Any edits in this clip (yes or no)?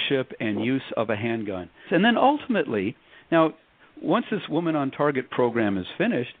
yes